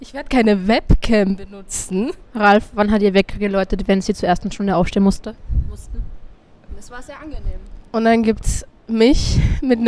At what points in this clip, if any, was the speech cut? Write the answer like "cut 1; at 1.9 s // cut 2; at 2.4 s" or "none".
cut 1; at 2.2 s // cut 2; at 6.7 s